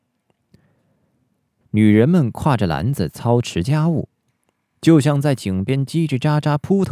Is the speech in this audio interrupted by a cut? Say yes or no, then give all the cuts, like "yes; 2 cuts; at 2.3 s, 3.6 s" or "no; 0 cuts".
yes; 1 cut; at 1.6 s